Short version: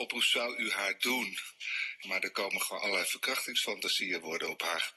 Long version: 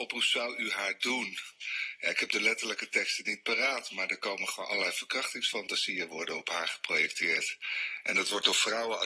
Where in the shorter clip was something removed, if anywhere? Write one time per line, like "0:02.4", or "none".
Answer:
0:02.0